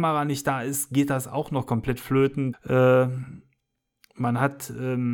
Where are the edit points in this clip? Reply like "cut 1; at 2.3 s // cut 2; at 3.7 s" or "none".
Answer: cut 1; at 2.5 s